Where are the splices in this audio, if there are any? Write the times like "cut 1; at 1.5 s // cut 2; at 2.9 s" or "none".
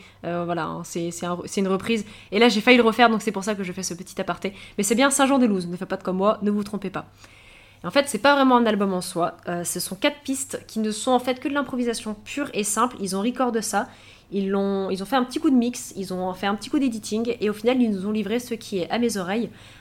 none